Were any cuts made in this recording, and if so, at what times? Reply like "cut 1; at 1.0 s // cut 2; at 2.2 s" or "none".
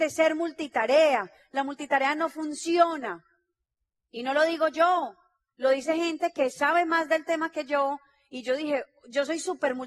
none